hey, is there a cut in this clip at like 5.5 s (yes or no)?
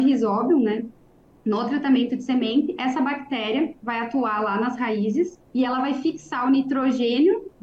yes